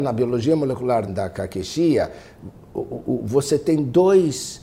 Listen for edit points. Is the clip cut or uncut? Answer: cut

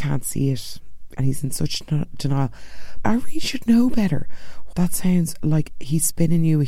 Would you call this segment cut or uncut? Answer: cut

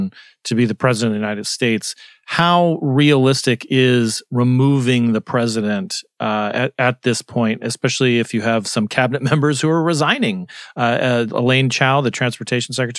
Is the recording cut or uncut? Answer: uncut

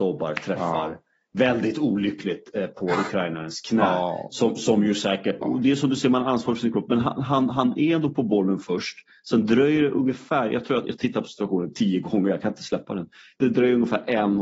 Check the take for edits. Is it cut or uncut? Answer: cut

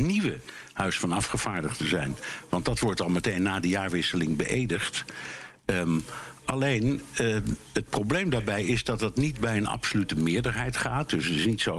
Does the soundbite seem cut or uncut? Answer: uncut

